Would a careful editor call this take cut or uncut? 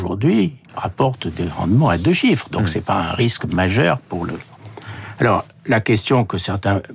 uncut